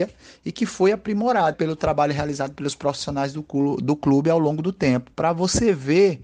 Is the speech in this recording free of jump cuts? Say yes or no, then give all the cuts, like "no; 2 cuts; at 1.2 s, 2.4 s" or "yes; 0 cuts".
no; 2 cuts; at 1.5 s, 5.1 s